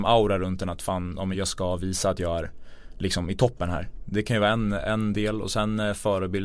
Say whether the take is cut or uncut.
cut